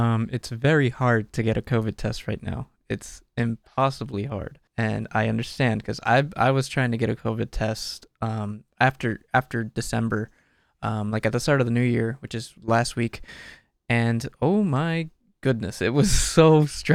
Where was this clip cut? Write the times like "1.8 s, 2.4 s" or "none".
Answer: 4.7 s